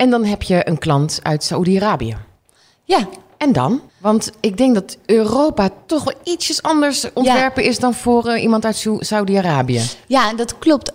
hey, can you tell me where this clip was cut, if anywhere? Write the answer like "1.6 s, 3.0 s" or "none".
3.9 s